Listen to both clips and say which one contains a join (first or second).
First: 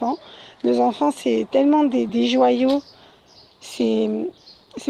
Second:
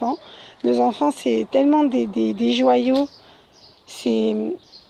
first